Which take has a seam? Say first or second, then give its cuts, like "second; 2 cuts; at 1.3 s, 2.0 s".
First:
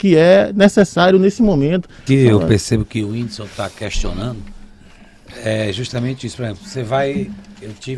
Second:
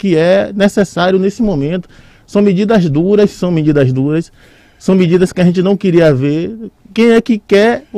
first; 1 cut; at 2.1 s